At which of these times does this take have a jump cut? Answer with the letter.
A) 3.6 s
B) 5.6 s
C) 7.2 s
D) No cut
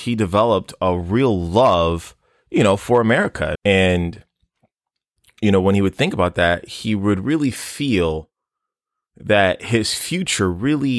A